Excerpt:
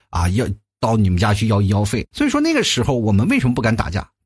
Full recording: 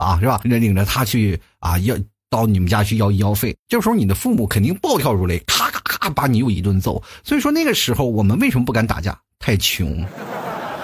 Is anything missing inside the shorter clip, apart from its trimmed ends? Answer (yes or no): yes